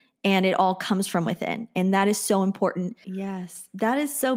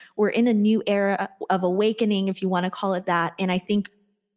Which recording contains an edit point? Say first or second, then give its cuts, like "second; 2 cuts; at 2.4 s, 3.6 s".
first; 1 cut; at 3.0 s